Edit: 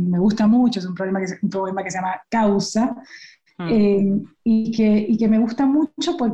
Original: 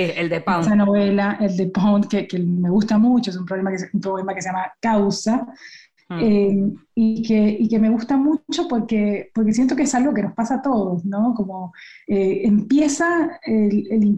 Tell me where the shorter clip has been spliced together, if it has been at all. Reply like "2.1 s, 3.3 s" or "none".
none

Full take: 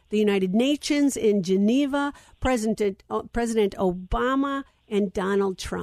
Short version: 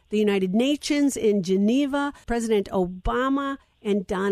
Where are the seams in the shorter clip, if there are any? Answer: 2.2 s

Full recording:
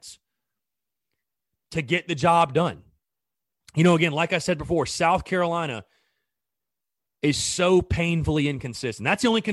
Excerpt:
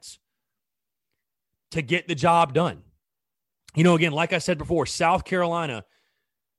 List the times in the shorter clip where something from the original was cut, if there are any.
none

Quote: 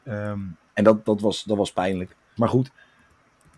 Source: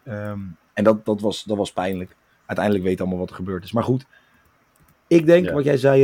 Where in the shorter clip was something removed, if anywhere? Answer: 2.4 s

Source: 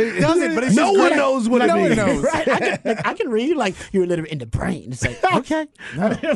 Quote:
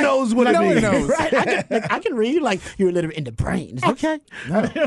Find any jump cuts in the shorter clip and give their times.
3.8 s

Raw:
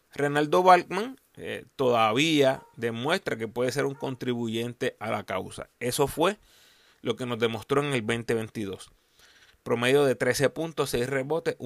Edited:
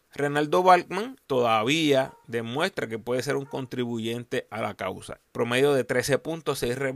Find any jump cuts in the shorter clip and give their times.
1.2 s, 5.3 s

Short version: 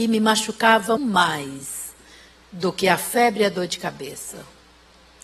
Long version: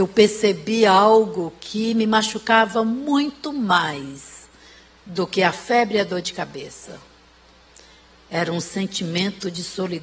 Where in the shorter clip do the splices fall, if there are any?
1.0 s

